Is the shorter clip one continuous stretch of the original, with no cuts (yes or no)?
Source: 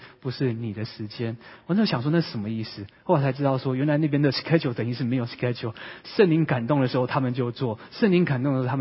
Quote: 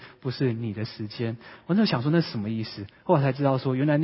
yes